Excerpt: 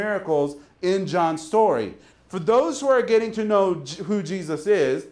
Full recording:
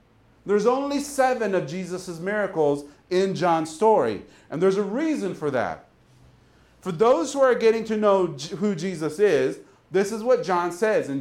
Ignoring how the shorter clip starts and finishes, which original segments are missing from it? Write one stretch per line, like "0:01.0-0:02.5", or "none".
0:04.4-0:06.6